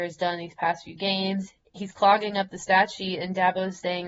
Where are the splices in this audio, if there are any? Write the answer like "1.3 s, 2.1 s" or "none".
1.7 s